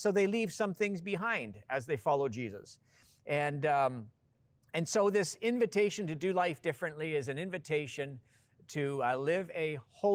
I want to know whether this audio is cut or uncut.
uncut